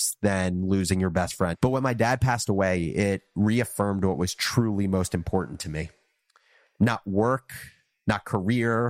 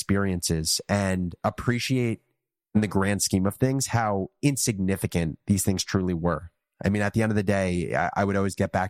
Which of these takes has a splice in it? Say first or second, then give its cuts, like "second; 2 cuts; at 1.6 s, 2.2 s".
first; 1 cut; at 1.5 s